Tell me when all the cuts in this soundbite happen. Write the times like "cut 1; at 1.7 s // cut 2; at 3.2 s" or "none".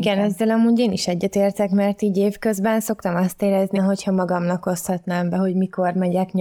cut 1; at 3.7 s